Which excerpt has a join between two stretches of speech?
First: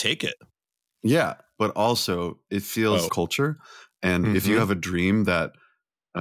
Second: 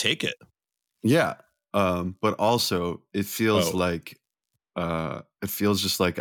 first; 2 cuts; at 1.6 s, 3.1 s

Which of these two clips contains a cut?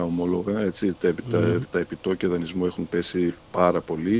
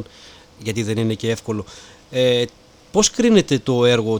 first; 1 cut; at 1.6 s

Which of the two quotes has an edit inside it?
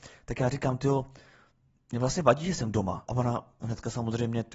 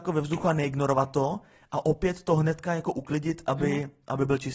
first; 1 cut; at 3.1 s

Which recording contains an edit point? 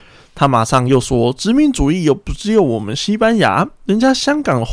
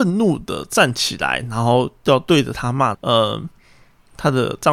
second; 1 cut; at 2.9 s

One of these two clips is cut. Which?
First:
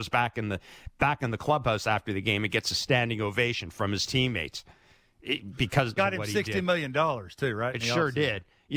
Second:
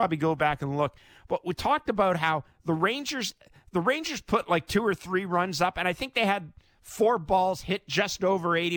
first; 1 cut; at 6.0 s

